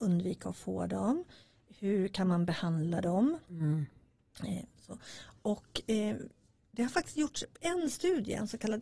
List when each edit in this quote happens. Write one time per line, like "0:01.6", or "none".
none